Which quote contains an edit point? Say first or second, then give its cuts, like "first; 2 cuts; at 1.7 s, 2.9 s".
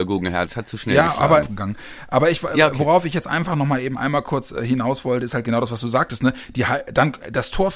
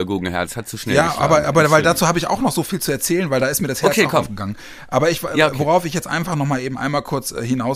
first; 1 cut; at 1.4 s